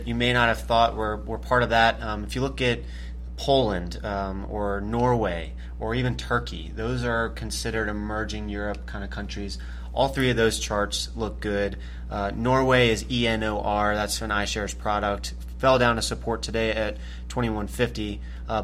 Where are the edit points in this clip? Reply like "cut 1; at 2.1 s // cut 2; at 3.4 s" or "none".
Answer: none